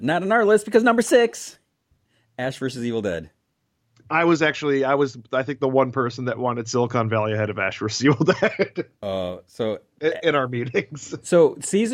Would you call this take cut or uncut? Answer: uncut